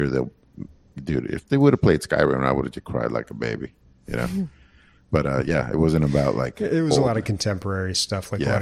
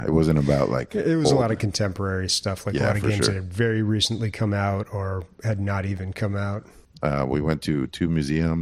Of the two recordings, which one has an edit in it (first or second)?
second